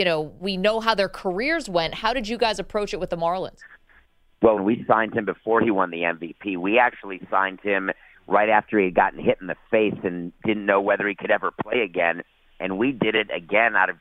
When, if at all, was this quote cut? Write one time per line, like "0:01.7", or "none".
0:04.6